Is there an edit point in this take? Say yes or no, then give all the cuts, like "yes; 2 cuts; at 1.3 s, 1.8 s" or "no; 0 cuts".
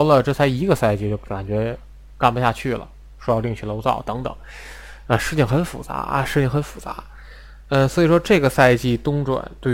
no; 0 cuts